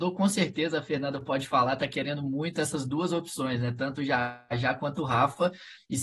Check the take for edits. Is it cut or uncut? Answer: uncut